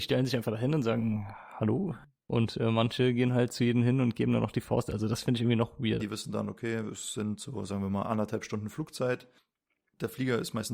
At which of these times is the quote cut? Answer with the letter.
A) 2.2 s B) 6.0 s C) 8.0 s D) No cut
B